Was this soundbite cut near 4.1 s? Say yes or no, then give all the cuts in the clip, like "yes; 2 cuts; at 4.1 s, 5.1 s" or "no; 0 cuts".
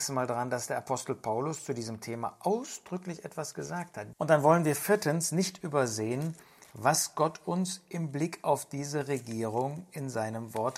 yes; 1 cut; at 4.1 s